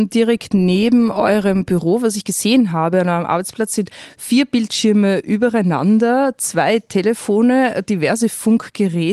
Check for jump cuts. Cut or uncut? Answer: uncut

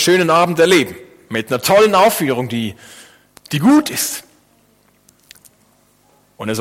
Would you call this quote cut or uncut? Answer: uncut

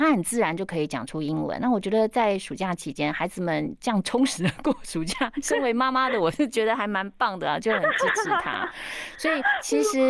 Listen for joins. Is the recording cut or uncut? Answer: uncut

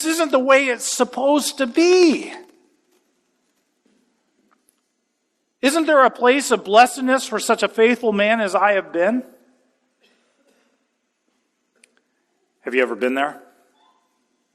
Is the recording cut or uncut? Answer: uncut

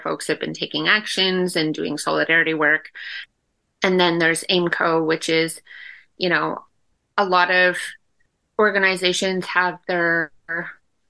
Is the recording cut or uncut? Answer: uncut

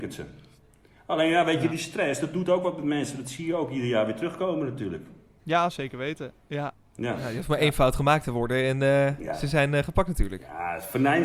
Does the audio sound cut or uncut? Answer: uncut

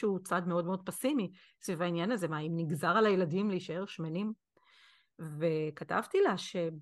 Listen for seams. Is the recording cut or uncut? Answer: uncut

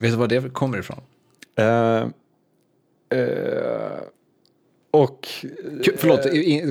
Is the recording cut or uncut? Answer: cut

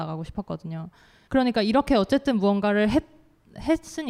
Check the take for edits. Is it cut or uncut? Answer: cut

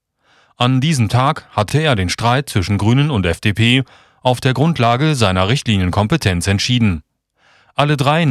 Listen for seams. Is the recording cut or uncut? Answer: uncut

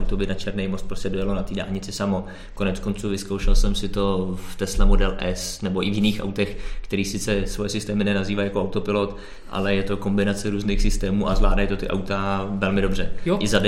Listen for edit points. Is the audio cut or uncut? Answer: uncut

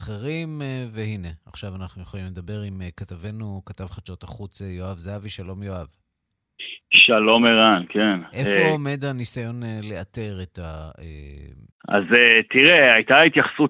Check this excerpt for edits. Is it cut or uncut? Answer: cut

